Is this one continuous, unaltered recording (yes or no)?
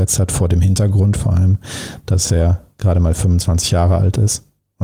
yes